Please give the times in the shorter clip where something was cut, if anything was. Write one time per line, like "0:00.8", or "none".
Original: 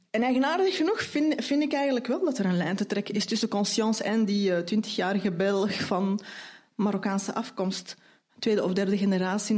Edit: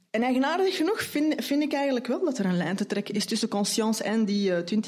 none